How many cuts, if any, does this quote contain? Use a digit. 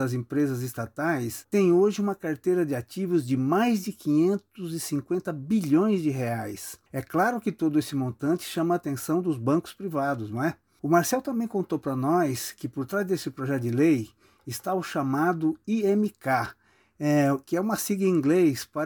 0